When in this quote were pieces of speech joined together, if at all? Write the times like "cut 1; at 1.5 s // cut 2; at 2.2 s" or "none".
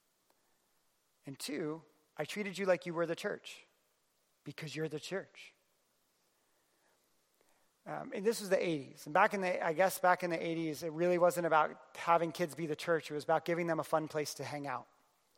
none